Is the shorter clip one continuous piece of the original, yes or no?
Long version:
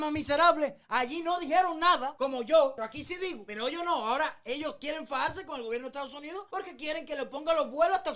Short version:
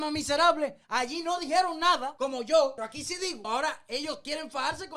no